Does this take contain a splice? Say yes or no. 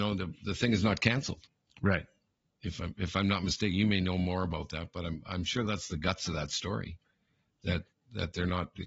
no